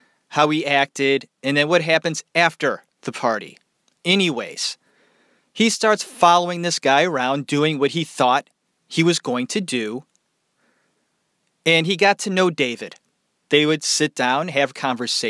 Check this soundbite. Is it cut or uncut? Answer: uncut